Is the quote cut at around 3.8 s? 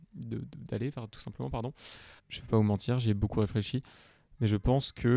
no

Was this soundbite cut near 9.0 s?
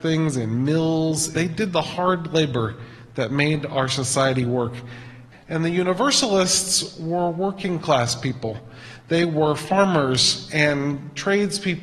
no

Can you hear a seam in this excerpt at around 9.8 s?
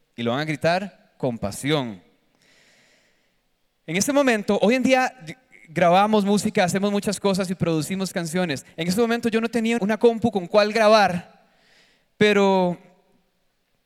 yes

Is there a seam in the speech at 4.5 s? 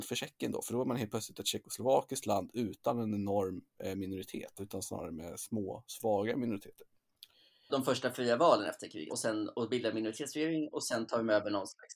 no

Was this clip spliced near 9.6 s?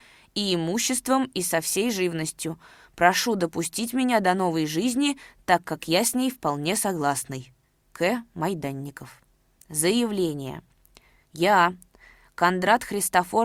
yes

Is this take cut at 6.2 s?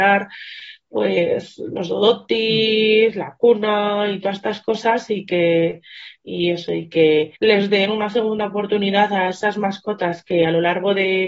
yes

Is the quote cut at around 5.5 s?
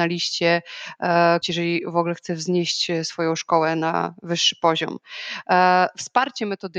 no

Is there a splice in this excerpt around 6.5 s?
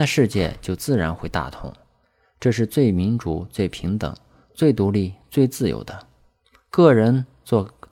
no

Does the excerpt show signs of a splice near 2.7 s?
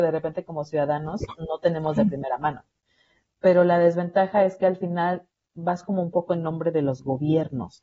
no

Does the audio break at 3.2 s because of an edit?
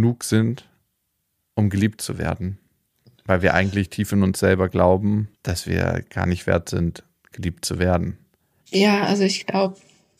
no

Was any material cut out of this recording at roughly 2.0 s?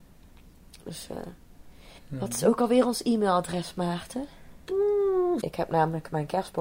yes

